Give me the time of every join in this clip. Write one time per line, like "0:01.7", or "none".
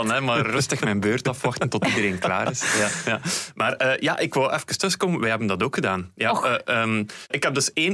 none